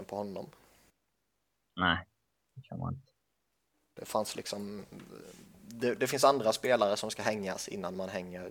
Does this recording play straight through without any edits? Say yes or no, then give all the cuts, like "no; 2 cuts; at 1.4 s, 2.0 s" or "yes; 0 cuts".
yes; 0 cuts